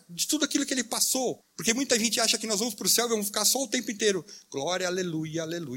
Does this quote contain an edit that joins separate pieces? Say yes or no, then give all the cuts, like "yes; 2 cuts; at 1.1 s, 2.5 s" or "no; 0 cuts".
yes; 1 cut; at 1.4 s